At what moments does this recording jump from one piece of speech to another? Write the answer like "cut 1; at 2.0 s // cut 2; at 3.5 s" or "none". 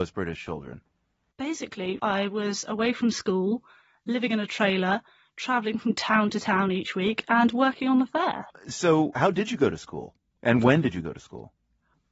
cut 1; at 2.0 s

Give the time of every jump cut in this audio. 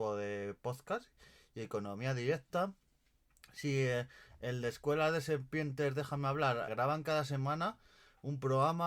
cut 1; at 6.7 s

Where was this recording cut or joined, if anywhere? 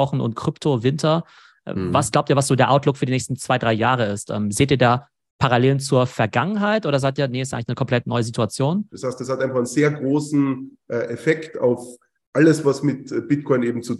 cut 1; at 8.9 s

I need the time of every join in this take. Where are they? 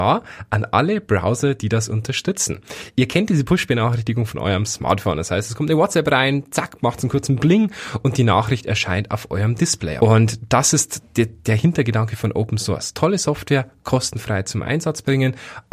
cut 1; at 10.0 s

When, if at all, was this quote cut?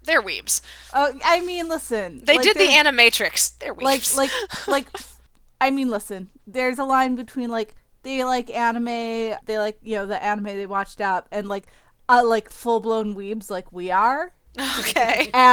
cut 1; at 9.4 s

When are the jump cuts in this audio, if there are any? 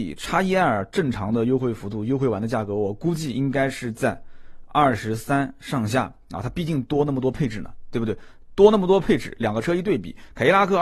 none

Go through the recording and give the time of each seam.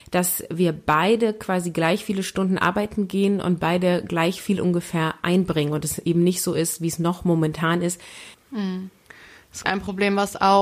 cut 1; at 8.3 s // cut 2; at 9.6 s

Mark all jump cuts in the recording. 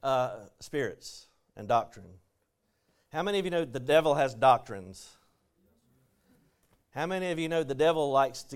none

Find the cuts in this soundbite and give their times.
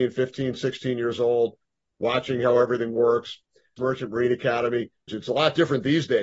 cut 1; at 3.8 s // cut 2; at 5.1 s

